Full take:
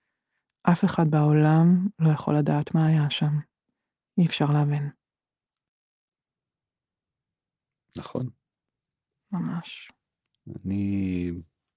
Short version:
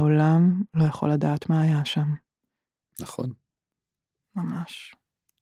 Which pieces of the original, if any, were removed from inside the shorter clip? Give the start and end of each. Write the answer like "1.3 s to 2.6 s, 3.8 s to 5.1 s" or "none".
4.1 s to 7.8 s